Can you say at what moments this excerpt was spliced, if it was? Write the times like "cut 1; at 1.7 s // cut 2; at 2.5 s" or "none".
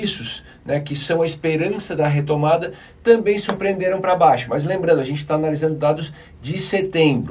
none